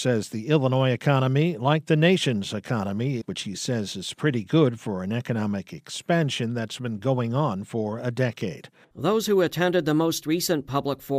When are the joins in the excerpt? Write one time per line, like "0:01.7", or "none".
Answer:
0:03.2
0:08.8